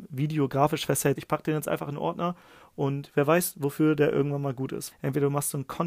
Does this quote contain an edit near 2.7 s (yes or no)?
no